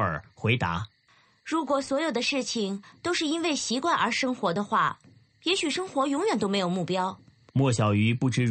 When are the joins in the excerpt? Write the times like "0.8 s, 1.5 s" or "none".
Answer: 7.5 s